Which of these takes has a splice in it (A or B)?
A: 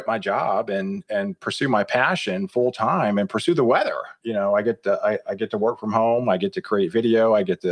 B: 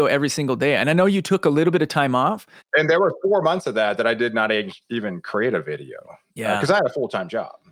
A